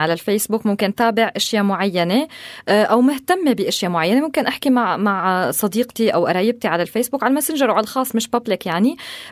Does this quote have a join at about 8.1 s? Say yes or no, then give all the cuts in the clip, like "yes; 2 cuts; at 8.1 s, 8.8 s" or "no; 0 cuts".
yes; 1 cut; at 8.1 s